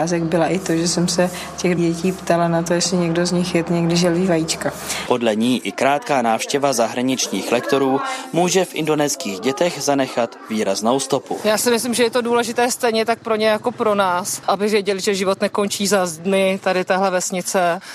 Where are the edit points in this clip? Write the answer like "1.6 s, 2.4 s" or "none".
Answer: 5.1 s